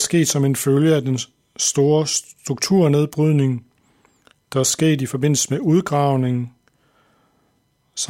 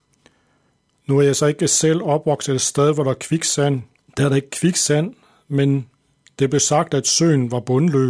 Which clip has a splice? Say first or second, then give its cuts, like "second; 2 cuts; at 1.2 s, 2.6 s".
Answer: second; 1 cut; at 4.1 s